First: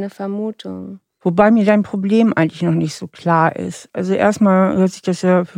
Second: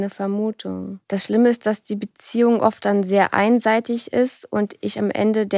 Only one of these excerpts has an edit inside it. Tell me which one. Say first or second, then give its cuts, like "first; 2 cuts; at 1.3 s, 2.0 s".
second; 1 cut; at 1.0 s